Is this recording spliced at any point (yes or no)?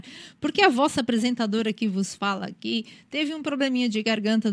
no